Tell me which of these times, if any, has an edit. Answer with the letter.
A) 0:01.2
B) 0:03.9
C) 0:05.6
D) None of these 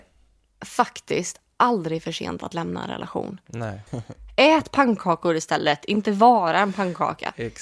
B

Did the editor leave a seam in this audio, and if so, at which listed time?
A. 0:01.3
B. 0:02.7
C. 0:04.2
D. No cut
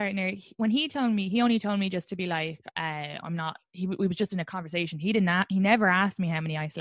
B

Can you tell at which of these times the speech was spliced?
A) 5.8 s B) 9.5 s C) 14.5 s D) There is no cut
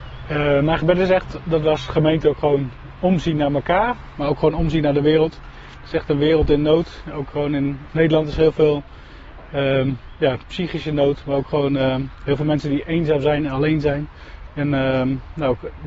C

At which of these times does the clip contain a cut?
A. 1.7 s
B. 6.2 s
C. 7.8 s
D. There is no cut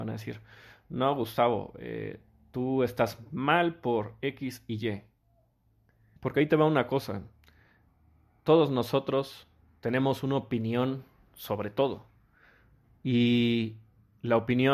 B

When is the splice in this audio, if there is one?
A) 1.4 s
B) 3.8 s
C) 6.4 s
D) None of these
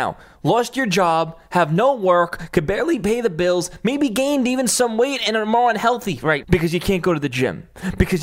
C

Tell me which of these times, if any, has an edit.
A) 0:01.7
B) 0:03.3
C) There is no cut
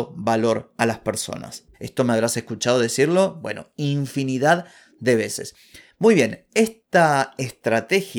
A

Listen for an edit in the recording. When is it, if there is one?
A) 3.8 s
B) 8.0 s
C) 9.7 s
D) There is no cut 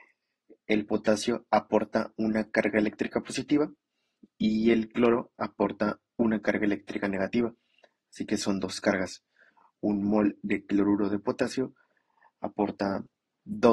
D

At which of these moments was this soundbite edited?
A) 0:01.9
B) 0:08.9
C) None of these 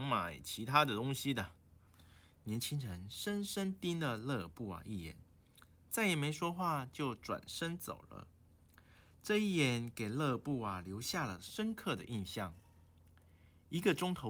A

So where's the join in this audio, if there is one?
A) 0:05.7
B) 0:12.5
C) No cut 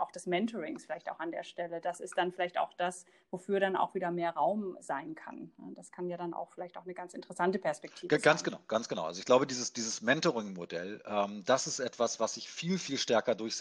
C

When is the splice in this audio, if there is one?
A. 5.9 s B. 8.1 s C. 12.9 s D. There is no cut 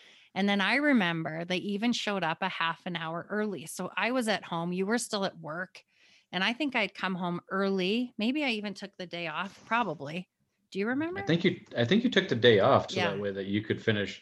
C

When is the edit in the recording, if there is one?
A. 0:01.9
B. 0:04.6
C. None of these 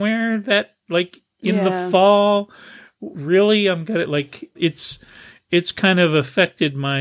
B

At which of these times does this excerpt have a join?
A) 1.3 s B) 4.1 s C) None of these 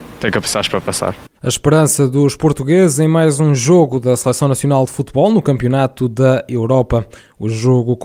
A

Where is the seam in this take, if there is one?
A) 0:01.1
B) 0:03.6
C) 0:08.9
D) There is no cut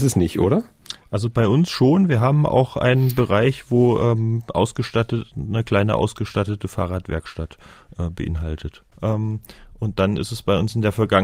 C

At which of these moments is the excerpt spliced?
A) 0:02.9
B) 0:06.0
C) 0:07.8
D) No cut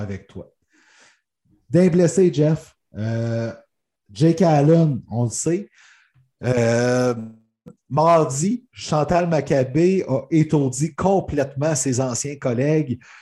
D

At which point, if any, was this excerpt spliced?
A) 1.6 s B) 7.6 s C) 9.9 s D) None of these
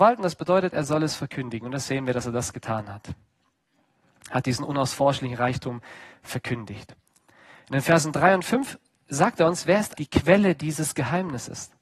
C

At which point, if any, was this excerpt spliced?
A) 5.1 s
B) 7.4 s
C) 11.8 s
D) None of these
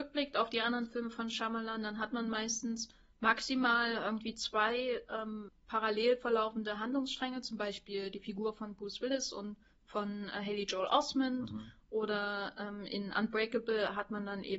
D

